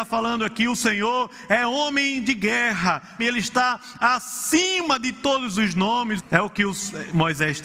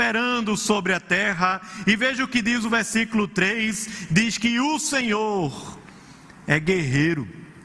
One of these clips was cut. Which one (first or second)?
first